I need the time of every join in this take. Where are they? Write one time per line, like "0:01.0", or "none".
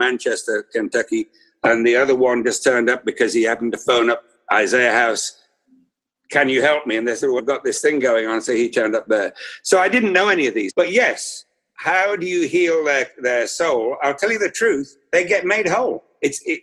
0:07.4
0:10.7